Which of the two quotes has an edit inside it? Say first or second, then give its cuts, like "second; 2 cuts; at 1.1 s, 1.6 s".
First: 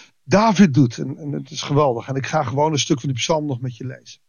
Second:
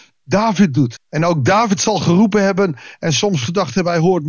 second; 1 cut; at 1.0 s